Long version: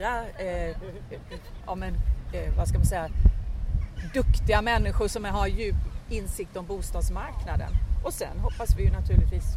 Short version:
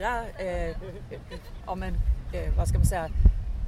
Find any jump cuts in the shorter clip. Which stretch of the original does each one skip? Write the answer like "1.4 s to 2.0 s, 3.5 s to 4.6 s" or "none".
none